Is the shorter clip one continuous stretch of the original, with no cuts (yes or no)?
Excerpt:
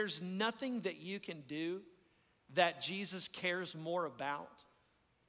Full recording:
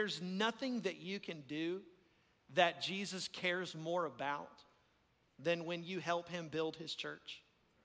yes